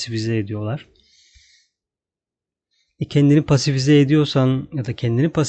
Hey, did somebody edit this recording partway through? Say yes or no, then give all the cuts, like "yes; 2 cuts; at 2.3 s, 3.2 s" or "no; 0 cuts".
no; 0 cuts